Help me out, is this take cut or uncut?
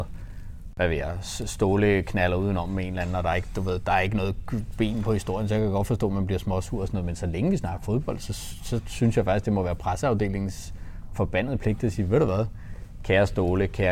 uncut